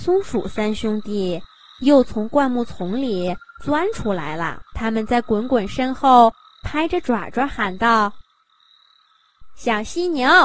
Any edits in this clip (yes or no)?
yes